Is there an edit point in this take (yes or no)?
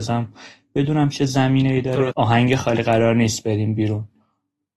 yes